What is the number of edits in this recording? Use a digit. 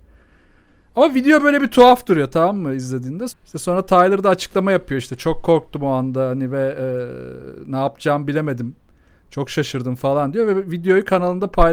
1